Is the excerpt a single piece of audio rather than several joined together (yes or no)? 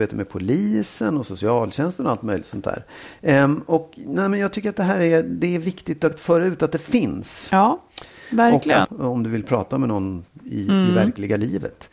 no